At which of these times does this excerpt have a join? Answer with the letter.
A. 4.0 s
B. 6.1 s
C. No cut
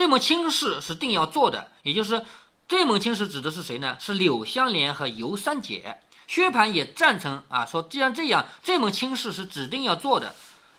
C